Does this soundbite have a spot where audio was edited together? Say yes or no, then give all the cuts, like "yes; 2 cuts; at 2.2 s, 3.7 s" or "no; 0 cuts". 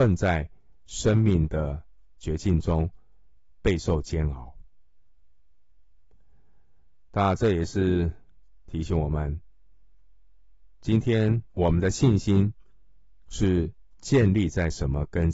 yes; 1 cut; at 11.5 s